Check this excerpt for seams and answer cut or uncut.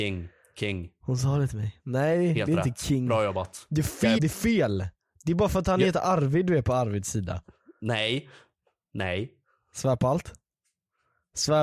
cut